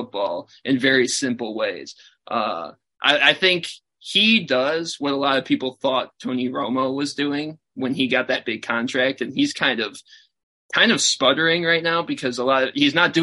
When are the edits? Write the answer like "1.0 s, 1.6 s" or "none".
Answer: none